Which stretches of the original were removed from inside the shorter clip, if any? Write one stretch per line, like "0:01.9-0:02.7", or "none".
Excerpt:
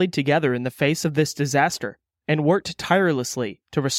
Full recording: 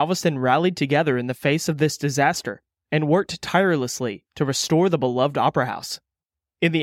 none